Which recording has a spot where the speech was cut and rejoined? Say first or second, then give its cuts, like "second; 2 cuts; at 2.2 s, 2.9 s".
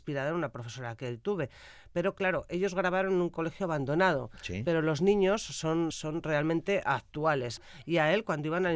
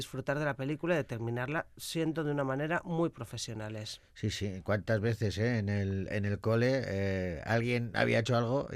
first; 2 cuts; at 5.9 s, 7.6 s